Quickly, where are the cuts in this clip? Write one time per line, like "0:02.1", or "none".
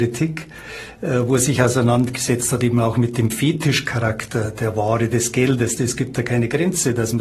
0:05.8